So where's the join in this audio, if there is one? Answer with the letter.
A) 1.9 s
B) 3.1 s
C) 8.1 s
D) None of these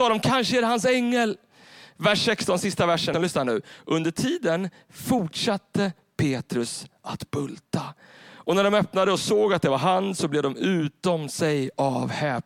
B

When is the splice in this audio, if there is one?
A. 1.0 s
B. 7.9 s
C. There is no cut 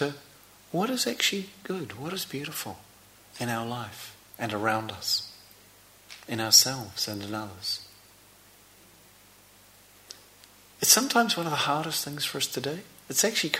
C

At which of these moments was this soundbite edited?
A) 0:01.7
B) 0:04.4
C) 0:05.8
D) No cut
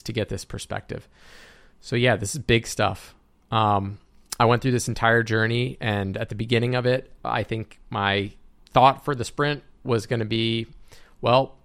D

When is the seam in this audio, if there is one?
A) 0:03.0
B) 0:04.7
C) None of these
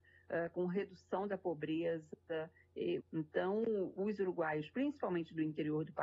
A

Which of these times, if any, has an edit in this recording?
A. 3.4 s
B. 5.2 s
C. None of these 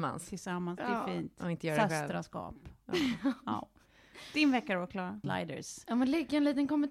B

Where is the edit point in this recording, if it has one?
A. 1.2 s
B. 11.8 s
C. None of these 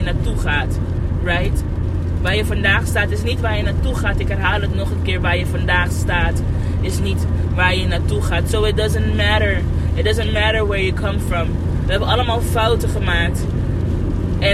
B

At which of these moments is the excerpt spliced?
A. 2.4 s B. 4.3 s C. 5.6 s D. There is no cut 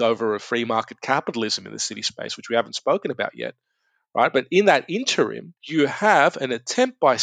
C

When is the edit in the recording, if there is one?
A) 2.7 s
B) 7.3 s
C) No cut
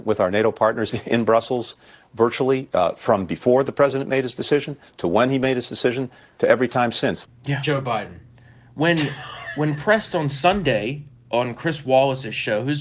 B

